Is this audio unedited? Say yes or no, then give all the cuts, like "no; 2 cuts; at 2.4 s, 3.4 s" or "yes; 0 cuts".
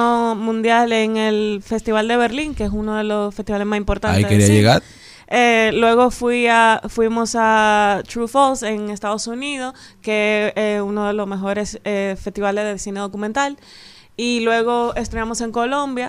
yes; 0 cuts